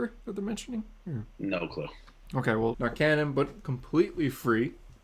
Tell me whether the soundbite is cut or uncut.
cut